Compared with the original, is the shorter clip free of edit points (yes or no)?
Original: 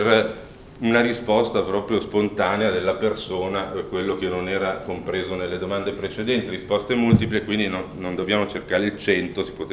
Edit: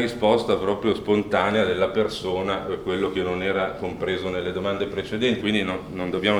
no